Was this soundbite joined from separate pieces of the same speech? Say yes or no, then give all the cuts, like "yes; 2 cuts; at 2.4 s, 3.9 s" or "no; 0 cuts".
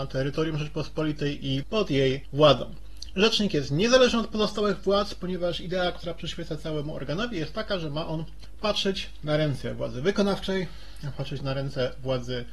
no; 0 cuts